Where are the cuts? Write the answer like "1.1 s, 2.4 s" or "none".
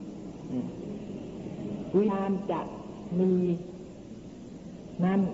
2.1 s